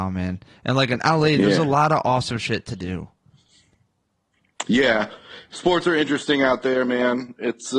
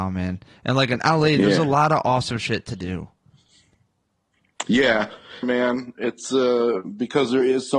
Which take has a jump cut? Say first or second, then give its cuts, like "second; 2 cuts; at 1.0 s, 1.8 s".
second; 1 cut; at 5.4 s